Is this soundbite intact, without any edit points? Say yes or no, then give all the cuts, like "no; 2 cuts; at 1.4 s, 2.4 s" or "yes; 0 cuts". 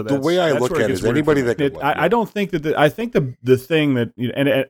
no; 1 cut; at 1.6 s